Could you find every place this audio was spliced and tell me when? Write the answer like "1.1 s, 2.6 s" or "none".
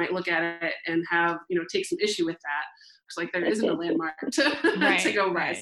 3.0 s